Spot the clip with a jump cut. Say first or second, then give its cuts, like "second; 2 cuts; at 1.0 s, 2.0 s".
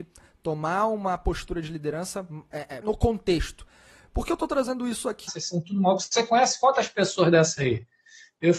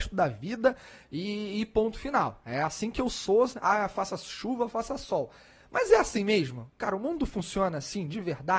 first; 2 cuts; at 2.8 s, 5.3 s